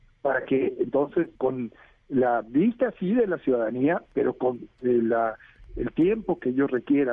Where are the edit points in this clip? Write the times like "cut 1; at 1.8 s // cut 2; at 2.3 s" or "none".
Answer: cut 1; at 1.4 s